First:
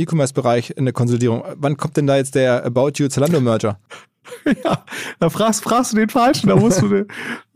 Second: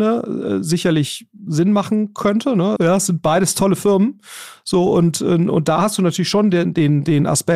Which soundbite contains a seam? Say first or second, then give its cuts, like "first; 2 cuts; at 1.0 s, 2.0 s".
second; 1 cut; at 2.8 s